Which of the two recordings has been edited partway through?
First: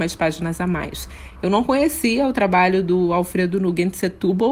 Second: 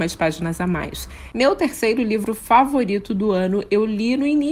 second; 1 cut; at 1.3 s

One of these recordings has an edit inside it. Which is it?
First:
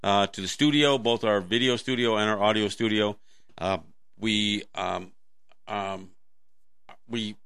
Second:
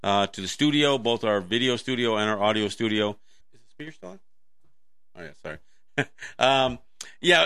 second; 1 cut; at 3.4 s

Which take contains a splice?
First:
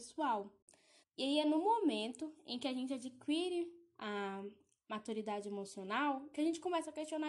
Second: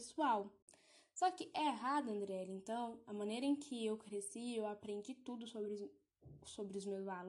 first; 1 cut; at 1.0 s

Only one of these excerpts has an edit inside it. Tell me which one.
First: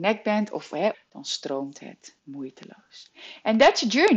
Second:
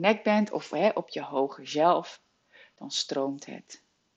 first; 2 cuts; at 0.9 s, 2.2 s

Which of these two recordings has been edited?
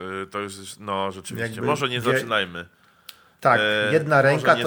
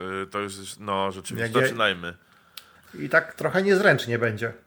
second; 2 cuts; at 1.5 s, 2.7 s

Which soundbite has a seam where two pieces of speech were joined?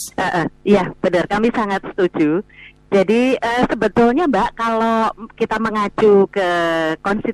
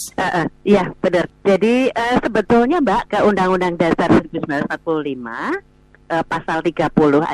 second; 2 cuts; at 1.3 s, 3.1 s

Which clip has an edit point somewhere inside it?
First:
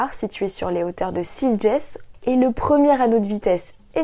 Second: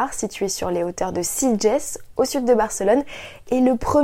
first; 1 cut; at 2.1 s

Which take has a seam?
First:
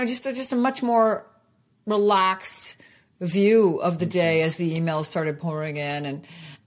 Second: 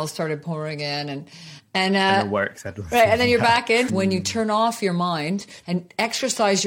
second; 2 cuts; at 3.9 s, 5.6 s

